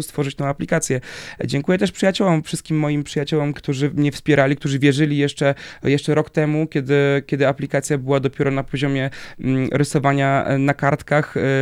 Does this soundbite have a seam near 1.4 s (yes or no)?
no